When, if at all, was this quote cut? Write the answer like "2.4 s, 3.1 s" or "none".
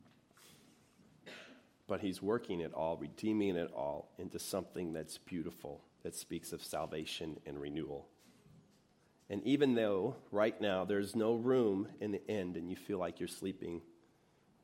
5.9 s